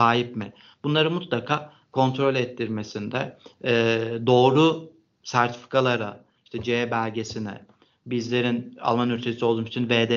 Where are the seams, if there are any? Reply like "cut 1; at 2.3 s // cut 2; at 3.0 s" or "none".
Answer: none

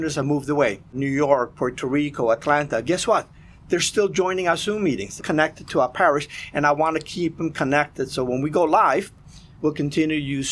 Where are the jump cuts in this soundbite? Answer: cut 1; at 5.2 s

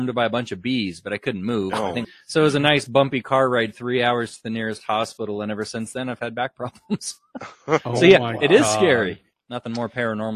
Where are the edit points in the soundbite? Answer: cut 1; at 2.0 s // cut 2; at 9.3 s

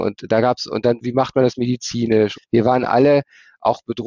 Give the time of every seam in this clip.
cut 1; at 2.3 s

